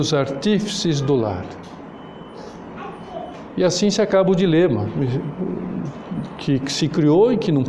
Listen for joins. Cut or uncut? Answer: uncut